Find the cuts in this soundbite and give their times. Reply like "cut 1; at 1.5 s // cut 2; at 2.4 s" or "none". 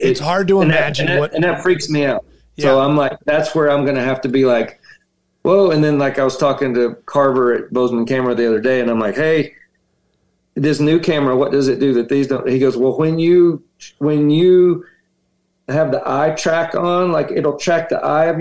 none